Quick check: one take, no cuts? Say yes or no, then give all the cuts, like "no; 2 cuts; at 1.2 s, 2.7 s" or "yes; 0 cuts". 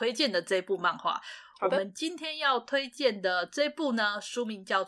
yes; 0 cuts